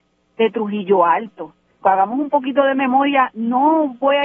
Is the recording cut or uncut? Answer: cut